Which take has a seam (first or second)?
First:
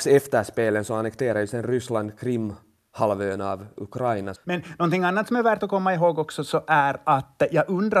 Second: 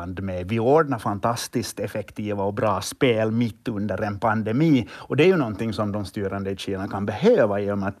first